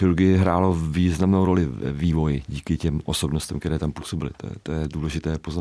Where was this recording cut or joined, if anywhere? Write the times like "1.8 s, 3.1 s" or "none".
none